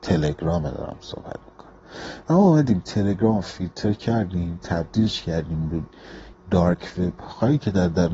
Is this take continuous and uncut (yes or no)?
no